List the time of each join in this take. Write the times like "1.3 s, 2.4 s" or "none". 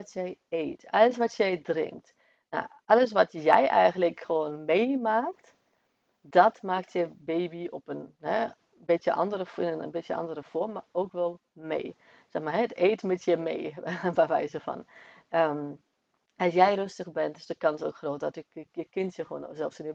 none